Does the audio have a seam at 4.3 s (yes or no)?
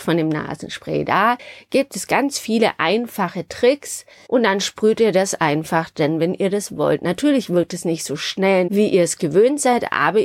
yes